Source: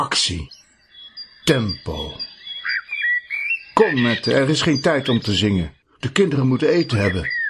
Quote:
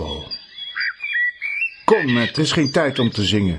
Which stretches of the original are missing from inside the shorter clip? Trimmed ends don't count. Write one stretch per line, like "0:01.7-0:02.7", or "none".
0:04.3-0:04.5